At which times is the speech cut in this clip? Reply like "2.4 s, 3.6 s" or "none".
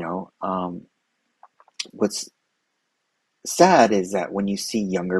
1.9 s